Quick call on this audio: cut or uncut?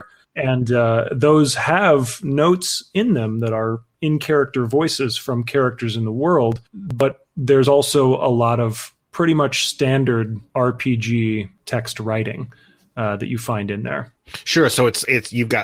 uncut